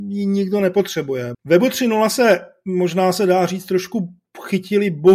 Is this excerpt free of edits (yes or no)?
no